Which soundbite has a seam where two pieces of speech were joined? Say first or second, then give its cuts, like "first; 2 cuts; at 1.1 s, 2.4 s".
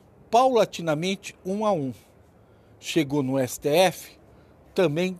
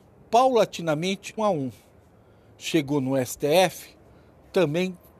second; 1 cut; at 1.4 s